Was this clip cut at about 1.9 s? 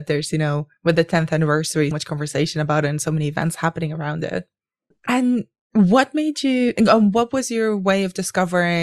yes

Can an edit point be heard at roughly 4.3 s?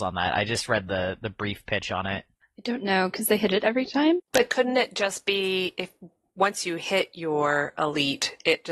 yes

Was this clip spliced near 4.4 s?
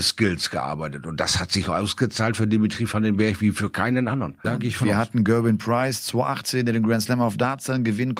yes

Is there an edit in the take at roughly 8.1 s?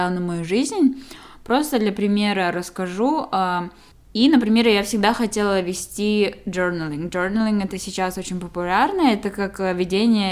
no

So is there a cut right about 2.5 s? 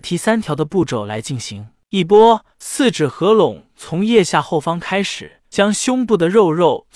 yes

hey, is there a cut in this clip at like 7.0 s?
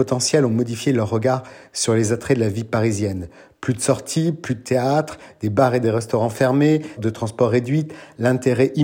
yes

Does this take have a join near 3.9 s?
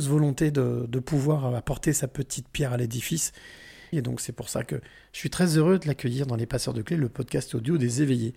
yes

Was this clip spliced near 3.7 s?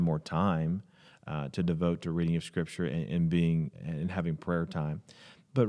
yes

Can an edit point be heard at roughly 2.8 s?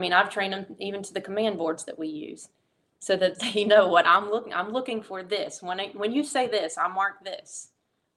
no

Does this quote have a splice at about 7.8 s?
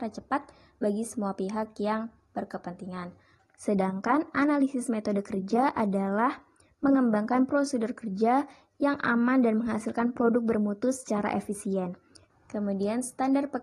no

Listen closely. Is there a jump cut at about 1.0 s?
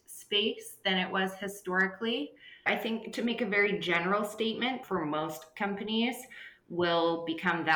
no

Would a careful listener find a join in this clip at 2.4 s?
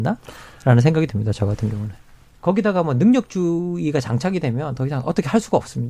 yes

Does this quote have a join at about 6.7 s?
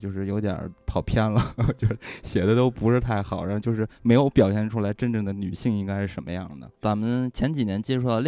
yes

